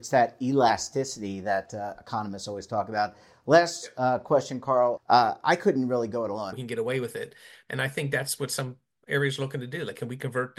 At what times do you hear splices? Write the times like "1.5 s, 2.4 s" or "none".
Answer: 5.0 s, 6.5 s, 7.7 s